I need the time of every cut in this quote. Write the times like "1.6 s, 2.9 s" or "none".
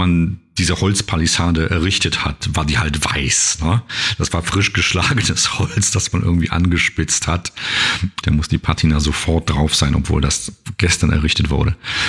8.2 s